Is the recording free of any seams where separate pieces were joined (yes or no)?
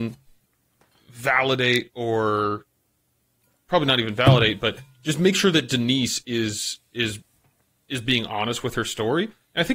yes